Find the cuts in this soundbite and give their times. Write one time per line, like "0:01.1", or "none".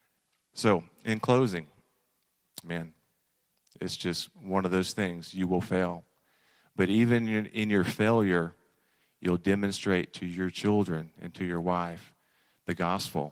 0:02.6